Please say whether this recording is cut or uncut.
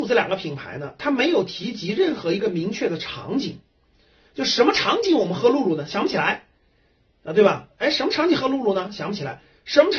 uncut